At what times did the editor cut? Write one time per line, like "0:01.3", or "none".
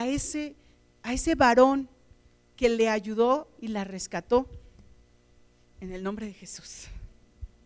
0:05.7

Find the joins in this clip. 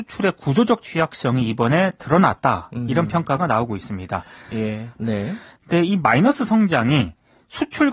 0:05.0

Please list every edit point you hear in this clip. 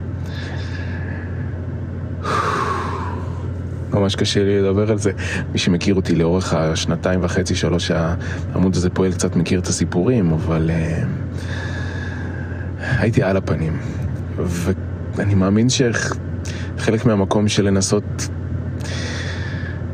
0:05.4

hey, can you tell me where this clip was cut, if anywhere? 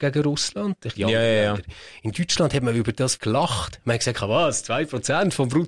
0:00.9
0:03.2

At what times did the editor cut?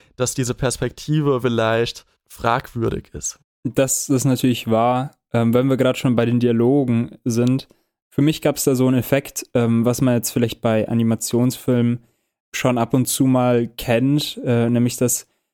none

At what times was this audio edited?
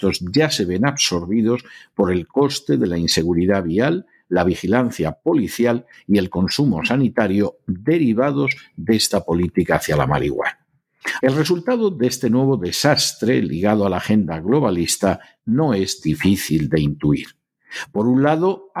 0:11.2

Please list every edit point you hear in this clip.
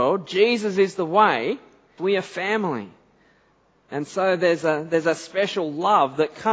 0:02.0

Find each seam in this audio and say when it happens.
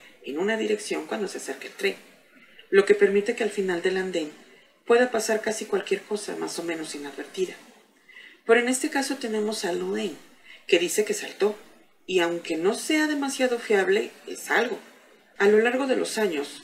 0:15.4

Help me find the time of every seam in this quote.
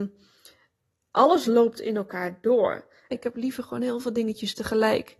0:03.1

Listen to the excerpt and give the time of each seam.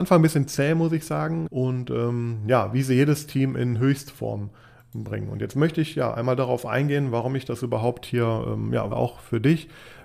0:01.5
0:08.9

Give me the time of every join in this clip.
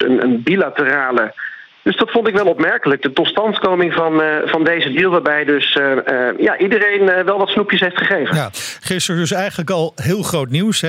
0:01.8

